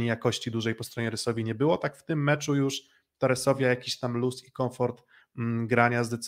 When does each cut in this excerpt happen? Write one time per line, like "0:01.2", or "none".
none